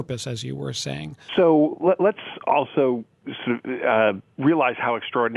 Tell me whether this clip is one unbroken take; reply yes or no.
no